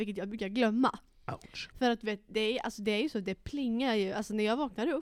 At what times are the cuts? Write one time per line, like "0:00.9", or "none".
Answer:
none